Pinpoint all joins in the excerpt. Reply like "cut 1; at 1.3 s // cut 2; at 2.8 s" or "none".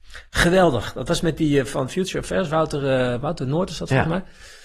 none